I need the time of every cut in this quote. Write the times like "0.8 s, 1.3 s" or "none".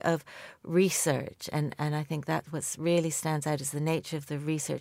1.5 s